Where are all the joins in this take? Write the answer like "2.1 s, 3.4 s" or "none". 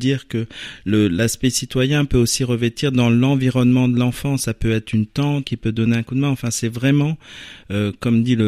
5.4 s